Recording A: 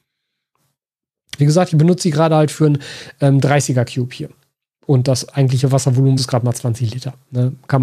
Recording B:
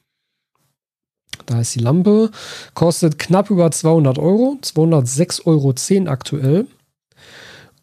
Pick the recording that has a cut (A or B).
A